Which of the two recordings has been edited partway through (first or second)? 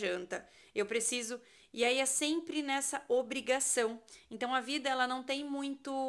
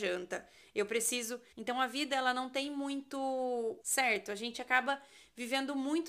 second